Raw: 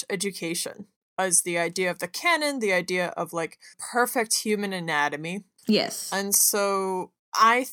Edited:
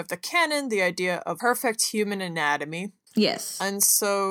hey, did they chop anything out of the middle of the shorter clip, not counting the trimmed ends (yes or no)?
yes